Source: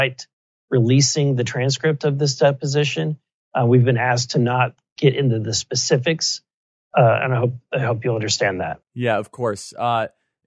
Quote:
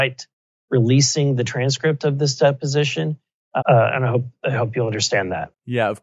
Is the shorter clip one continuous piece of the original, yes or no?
no